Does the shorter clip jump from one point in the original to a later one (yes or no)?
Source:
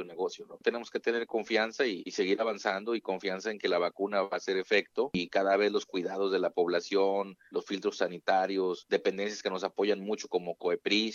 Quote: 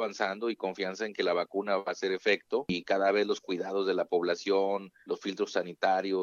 no